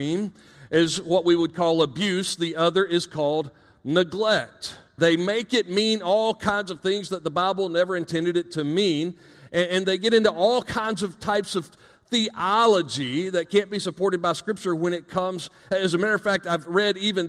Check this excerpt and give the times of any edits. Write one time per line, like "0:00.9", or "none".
0:05.0